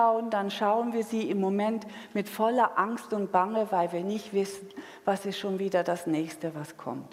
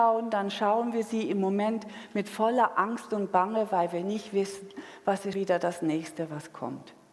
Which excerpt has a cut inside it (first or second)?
second